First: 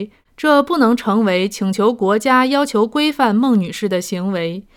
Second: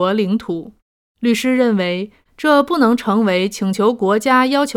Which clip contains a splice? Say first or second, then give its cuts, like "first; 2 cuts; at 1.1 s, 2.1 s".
second; 1 cut; at 1.0 s